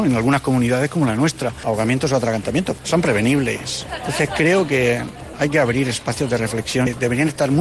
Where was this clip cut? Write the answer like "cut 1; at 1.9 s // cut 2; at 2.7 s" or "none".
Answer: none